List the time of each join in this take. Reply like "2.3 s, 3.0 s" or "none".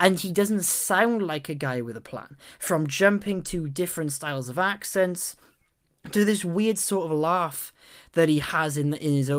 none